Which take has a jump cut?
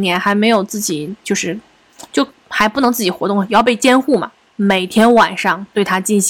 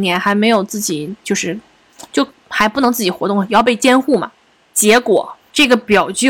first; 1 cut; at 4.5 s

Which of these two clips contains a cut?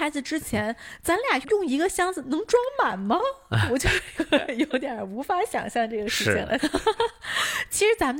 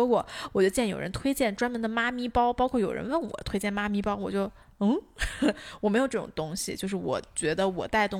first; 2 cuts; at 1.4 s, 6.6 s

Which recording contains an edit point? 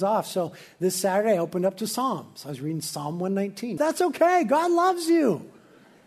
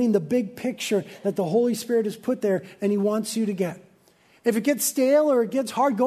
first; 1 cut; at 3.8 s

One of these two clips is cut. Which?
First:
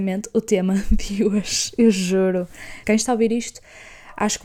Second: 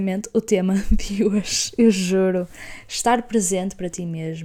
first; 1 cut; at 2.8 s

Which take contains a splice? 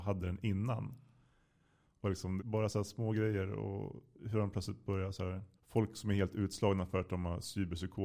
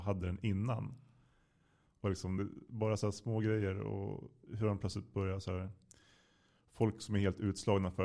first; 2 cuts; at 2.4 s, 5.6 s

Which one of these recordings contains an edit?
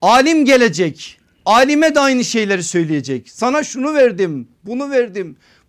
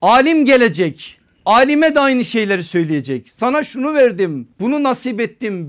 second; 1 cut; at 4.5 s

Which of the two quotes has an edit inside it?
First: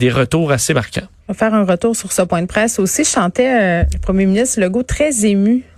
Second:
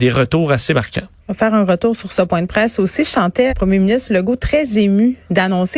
second; 1 cut; at 3.5 s

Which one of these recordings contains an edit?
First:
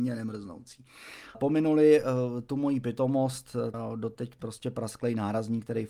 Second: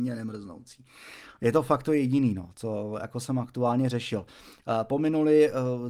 first; 2 cuts; at 1.3 s, 3.7 s

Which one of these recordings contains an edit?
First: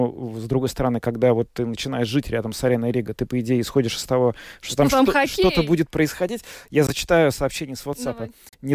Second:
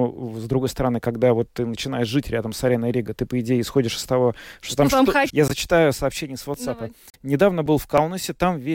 second; 1 cut; at 5.3 s

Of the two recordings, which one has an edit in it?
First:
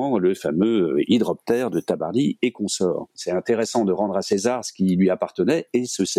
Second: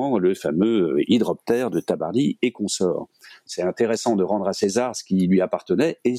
first; 1 cut; at 3.1 s

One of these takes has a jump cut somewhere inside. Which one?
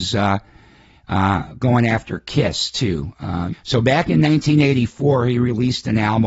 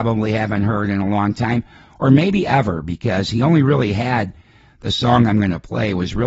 first; 1 cut; at 3.5 s

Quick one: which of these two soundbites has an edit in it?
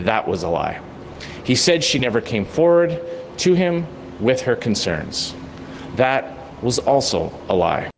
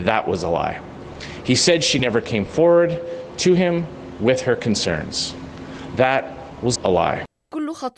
second; 1 cut; at 6.8 s

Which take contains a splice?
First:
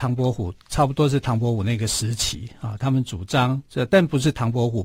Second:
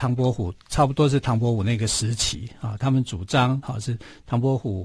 second; 1 cut; at 3.6 s

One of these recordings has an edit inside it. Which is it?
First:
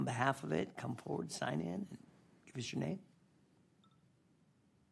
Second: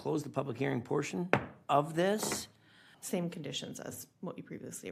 second; 1 cut; at 2.9 s

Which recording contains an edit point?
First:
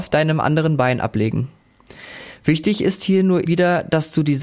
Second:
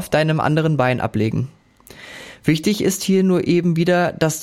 first; 1 cut; at 3.5 s

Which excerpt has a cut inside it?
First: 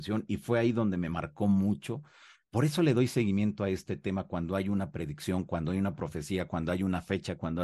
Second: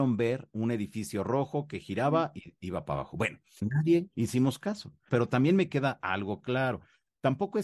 second; 2 cuts; at 3.6 s, 5.1 s

